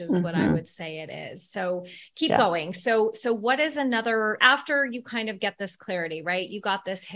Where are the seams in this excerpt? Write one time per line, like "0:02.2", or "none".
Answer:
0:04.4